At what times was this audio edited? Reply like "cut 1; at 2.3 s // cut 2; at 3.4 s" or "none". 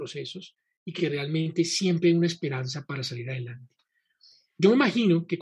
none